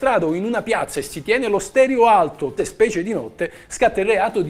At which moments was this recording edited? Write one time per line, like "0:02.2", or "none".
0:02.6